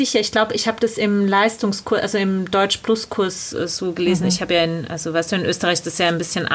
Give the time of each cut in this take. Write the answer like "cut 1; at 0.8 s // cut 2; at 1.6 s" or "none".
none